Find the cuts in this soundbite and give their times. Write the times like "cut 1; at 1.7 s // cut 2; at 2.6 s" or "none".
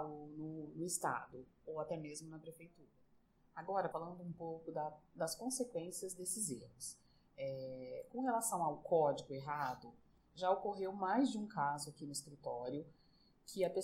cut 1; at 3.9 s